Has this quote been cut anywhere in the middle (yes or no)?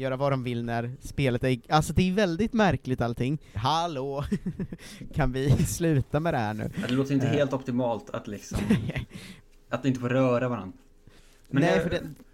yes